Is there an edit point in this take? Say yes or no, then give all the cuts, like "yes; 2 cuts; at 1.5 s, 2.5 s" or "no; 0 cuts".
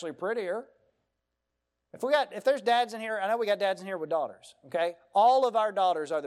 yes; 1 cut; at 1.8 s